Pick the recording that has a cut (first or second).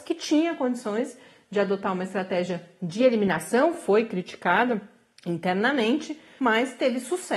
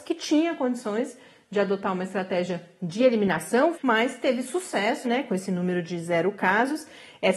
second